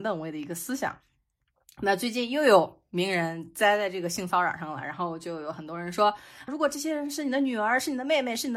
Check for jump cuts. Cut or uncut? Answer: cut